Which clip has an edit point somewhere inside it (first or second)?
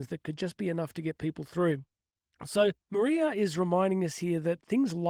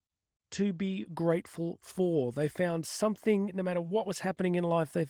first